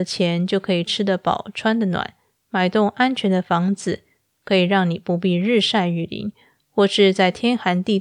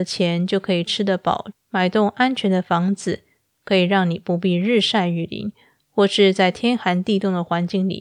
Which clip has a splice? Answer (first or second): second